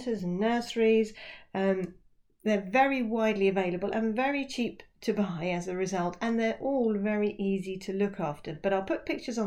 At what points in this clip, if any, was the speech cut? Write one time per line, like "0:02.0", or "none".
none

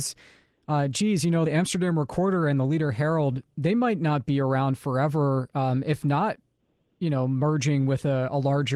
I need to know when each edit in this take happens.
none

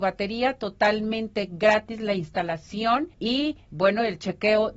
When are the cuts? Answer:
0:03.1

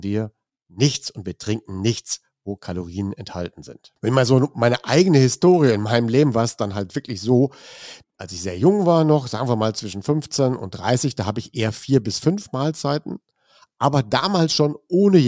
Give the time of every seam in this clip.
0:08.0

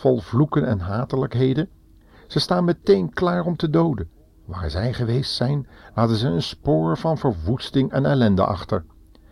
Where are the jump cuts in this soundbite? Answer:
none

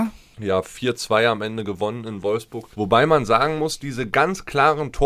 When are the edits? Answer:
0:02.7

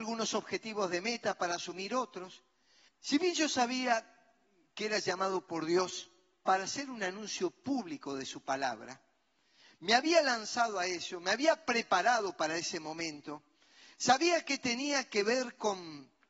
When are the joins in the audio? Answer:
0:02.9

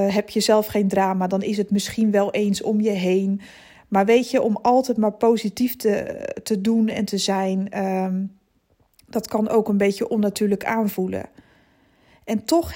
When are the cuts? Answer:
none

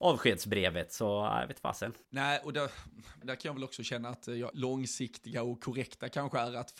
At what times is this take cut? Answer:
0:02.0
0:03.2
0:04.5

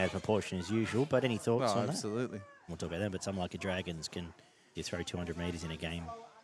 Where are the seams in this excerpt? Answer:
0:02.7
0:04.7

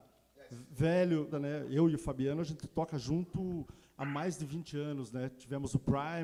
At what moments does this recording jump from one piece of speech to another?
0:01.3

